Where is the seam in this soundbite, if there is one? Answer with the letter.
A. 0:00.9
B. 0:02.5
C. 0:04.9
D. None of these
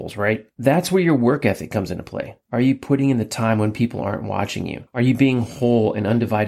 D